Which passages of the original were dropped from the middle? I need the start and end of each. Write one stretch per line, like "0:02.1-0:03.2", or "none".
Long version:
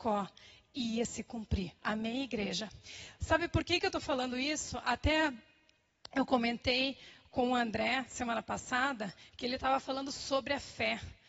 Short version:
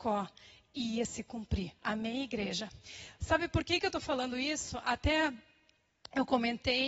none